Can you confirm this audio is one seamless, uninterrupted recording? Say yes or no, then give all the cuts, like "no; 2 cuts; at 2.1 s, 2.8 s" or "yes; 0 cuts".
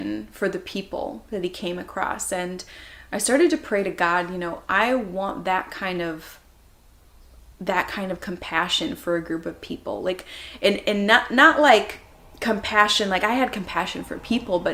yes; 0 cuts